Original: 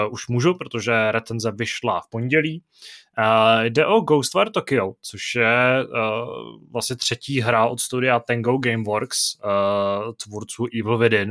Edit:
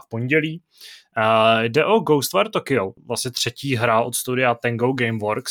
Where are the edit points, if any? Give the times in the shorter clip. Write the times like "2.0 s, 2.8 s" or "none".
3.0 s